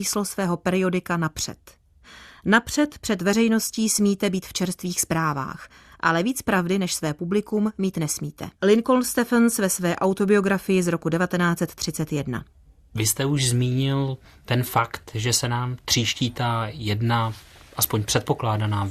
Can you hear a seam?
yes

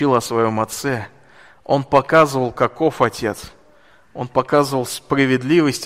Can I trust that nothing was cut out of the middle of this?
yes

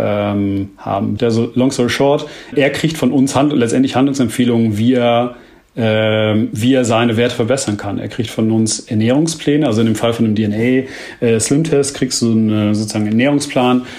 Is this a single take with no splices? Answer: no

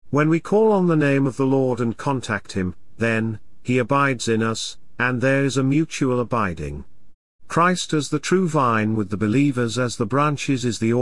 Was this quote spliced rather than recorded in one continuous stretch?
yes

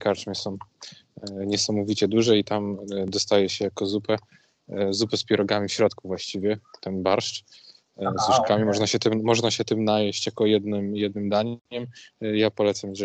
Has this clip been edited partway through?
no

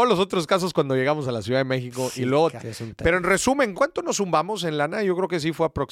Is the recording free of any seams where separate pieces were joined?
no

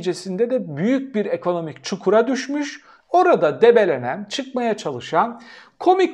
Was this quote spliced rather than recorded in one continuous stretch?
no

